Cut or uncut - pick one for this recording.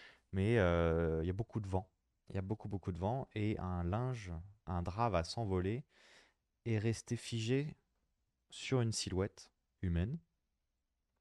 cut